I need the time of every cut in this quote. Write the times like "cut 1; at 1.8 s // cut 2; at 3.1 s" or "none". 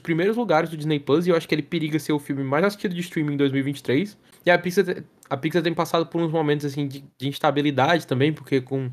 cut 1; at 4.3 s